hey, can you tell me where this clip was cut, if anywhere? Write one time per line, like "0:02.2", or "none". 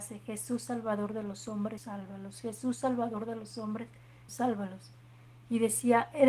0:01.8
0:04.3